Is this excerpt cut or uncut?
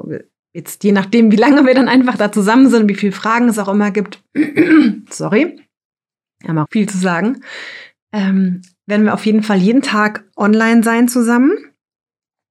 cut